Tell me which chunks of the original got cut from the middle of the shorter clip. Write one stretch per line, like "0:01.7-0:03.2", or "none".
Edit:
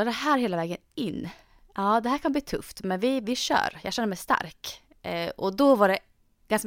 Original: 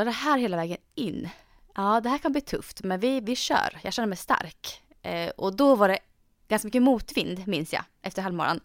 none